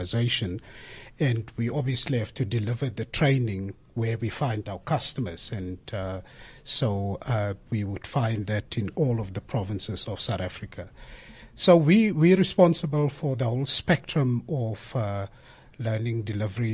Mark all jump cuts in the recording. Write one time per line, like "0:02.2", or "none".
none